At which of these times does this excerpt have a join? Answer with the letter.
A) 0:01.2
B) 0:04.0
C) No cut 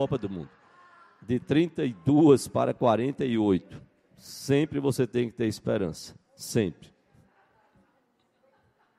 C